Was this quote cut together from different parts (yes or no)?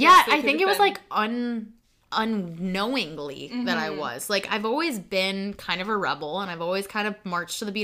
no